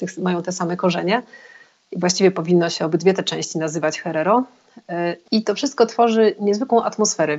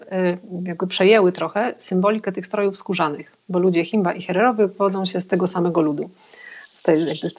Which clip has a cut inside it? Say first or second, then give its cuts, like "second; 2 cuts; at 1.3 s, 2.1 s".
first; 1 cut; at 5.3 s